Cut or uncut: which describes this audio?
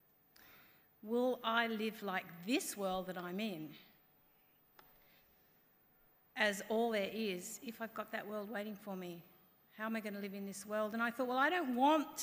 uncut